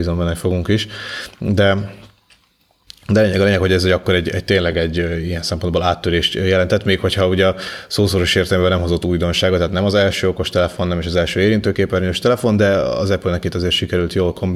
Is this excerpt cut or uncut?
uncut